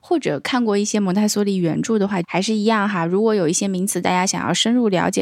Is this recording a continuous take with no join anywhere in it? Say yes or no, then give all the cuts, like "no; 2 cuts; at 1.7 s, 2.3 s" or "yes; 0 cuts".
no; 1 cut; at 2.2 s